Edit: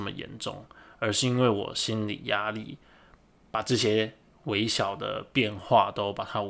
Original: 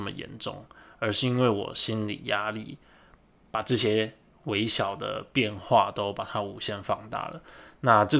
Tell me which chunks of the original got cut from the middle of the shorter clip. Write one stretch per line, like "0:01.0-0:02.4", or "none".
none